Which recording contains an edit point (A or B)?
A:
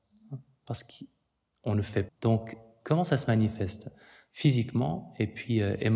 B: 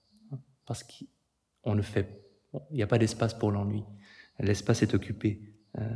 A